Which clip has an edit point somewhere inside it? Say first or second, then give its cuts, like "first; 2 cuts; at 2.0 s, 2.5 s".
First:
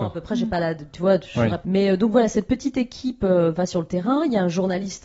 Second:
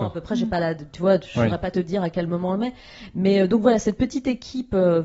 first; 1 cut; at 1.6 s